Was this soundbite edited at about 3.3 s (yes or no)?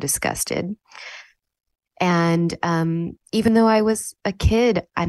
no